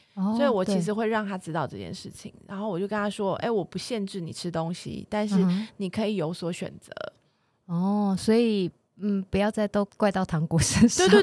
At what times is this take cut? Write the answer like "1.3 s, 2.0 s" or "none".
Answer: 9.9 s